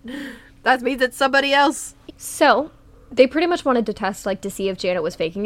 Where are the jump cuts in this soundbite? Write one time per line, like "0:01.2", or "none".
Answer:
0:02.1